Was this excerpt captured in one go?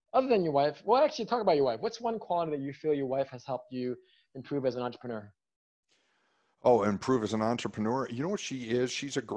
yes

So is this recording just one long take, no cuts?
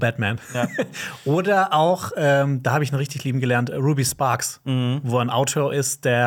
yes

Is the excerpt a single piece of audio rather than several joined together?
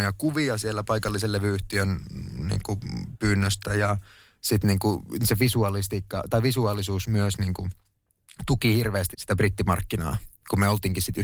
no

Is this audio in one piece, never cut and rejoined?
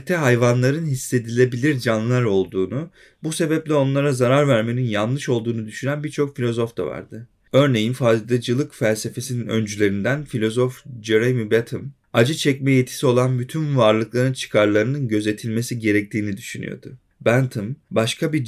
yes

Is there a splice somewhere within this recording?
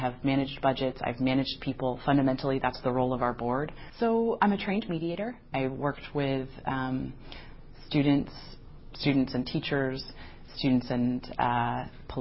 yes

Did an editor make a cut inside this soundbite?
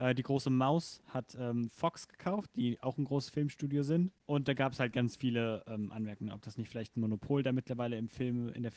no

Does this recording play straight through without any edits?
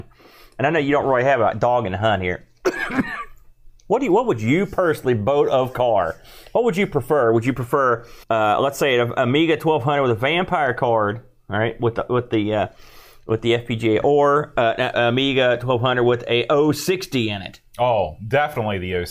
no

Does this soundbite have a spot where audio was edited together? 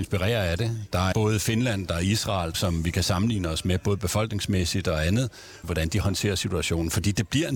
yes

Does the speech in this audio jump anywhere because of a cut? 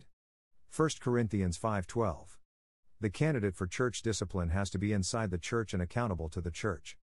no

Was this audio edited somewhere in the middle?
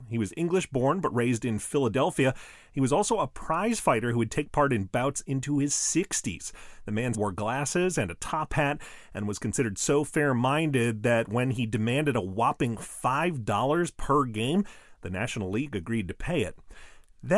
yes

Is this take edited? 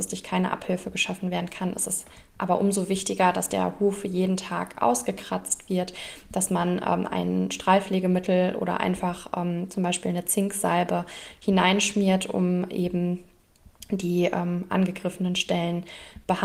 no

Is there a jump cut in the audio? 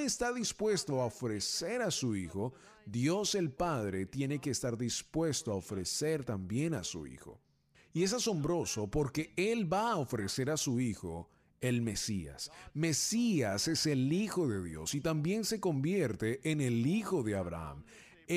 no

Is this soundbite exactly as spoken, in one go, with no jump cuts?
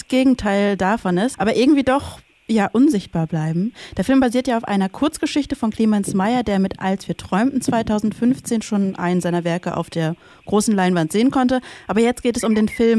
no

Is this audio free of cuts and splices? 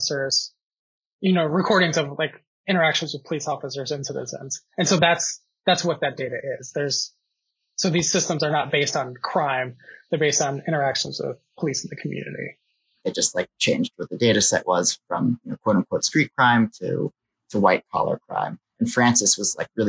no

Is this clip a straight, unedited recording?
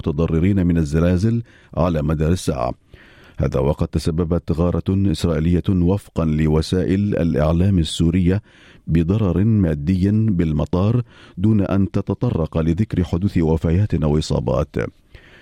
yes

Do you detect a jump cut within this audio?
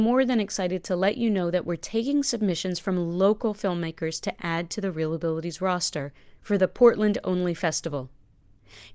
no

